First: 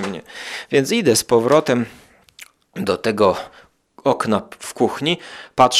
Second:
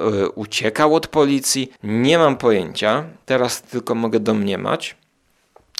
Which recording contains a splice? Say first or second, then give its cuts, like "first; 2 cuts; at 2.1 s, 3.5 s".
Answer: second; 1 cut; at 1.8 s